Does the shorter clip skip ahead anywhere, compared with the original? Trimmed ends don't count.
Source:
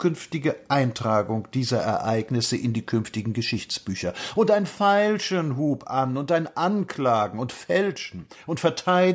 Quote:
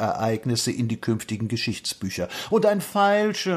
no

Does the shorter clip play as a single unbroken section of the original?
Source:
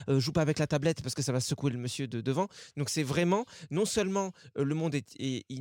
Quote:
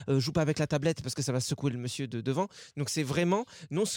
yes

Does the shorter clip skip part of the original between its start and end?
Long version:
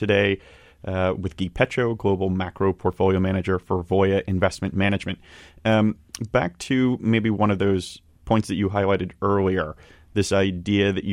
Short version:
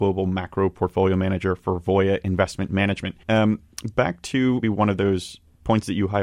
yes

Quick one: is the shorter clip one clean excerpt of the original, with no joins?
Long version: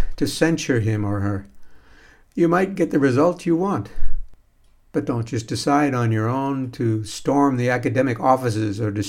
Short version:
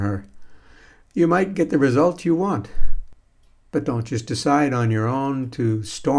yes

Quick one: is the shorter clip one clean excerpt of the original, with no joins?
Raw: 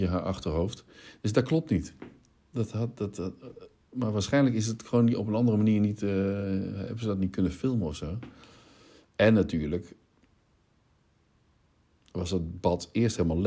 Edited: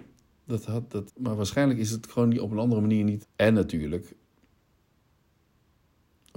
no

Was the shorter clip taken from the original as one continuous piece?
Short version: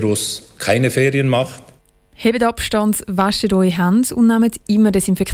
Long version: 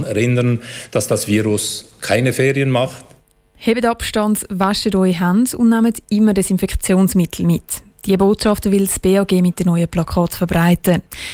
yes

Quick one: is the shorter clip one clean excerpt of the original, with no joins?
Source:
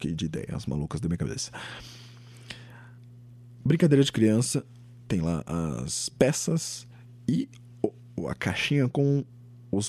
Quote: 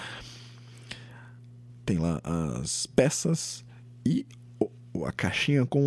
no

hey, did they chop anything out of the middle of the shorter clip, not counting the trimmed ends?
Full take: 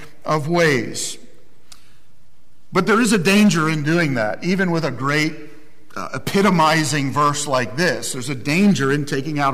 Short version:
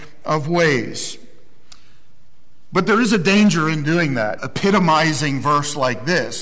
yes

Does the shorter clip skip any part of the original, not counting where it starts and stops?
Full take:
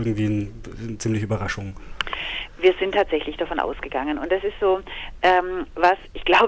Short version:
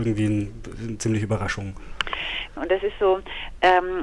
yes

